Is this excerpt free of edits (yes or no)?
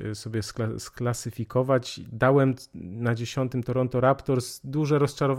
yes